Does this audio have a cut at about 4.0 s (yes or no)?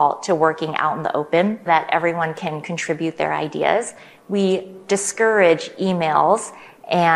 no